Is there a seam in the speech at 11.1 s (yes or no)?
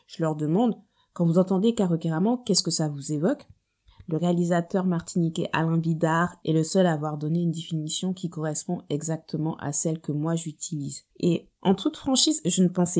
yes